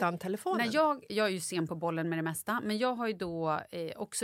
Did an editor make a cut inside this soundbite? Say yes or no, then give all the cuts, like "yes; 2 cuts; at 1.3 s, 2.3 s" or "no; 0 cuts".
yes; 1 cut; at 1.1 s